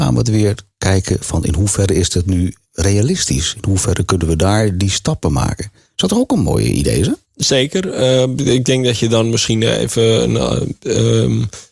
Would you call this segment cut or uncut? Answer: cut